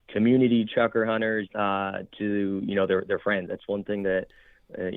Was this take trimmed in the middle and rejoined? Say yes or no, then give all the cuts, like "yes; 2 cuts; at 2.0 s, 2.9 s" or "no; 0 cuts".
yes; 2 cuts; at 1.5 s, 3.5 s